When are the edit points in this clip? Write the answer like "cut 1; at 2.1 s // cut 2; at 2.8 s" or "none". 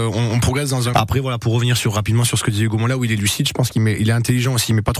cut 1; at 0.9 s